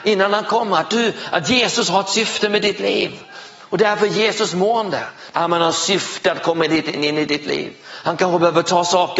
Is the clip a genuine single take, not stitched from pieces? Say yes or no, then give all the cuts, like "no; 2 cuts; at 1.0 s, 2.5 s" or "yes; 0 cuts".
no; 1 cut; at 5.3 s